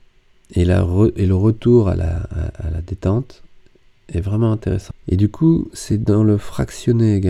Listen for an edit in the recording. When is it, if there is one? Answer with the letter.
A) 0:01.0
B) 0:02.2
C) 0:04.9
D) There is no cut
C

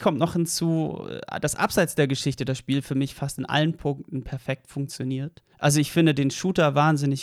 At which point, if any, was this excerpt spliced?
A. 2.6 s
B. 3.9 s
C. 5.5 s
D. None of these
C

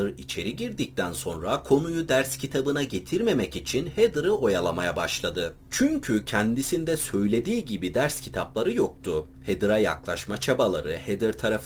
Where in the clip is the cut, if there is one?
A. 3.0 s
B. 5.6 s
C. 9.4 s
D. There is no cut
D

